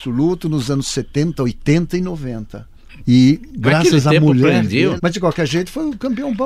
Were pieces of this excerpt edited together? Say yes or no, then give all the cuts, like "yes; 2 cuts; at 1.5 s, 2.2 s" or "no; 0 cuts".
yes; 2 cuts; at 3.0 s, 5.0 s